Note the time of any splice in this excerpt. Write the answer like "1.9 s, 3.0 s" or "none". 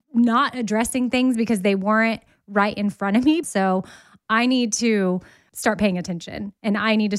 3.4 s